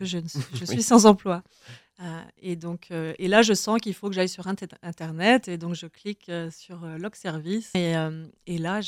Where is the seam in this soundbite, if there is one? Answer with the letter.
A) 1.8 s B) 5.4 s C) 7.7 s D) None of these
C